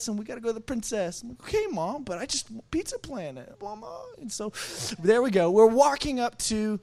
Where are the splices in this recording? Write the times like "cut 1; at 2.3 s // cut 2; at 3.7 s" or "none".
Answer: cut 1; at 3.5 s